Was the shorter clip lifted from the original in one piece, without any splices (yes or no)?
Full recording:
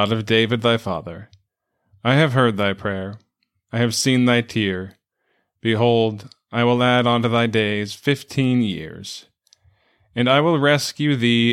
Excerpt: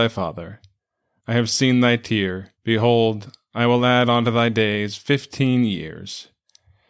no